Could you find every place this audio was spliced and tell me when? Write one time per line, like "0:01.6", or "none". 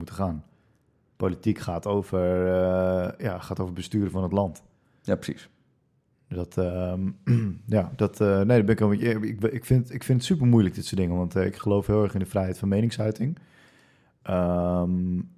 none